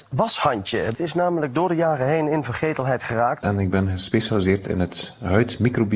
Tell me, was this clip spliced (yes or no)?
yes